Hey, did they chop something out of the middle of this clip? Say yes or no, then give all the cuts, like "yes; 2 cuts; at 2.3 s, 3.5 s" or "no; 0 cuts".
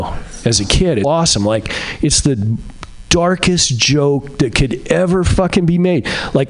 yes; 1 cut; at 1.0 s